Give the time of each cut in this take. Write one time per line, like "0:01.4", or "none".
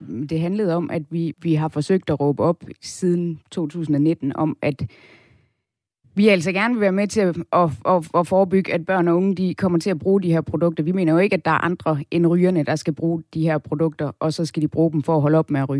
0:01.3